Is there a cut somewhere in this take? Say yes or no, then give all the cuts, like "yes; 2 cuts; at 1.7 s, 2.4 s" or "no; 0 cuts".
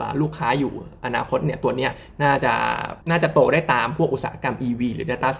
yes; 1 cut; at 3.0 s